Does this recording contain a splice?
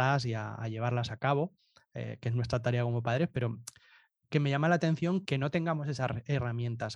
yes; 1 cut; at 5.2 s

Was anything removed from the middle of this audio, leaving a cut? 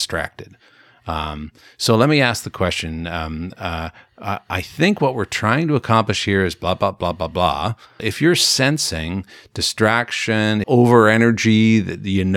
yes; 2 cuts; at 8.0 s, 10.6 s

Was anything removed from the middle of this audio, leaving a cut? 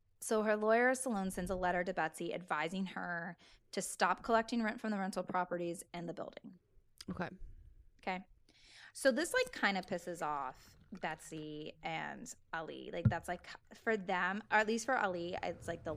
no; 0 cuts

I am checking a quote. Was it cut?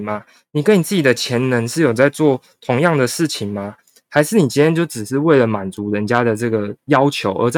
no; 0 cuts

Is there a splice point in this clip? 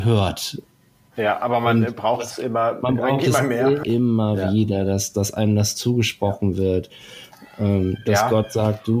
yes; 1 cut; at 3.8 s

